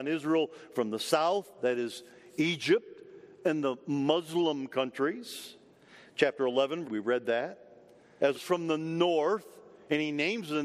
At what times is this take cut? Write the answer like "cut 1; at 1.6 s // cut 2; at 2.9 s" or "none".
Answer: cut 1; at 6.8 s // cut 2; at 8.3 s